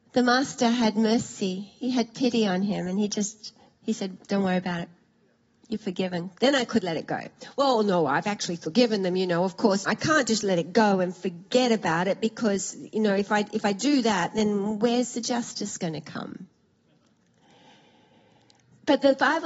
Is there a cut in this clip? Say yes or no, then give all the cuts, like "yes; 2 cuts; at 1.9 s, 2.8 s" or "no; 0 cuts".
yes; 2 cuts; at 6.3 s, 9.9 s